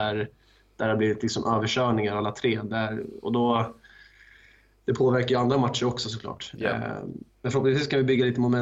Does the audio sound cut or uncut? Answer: uncut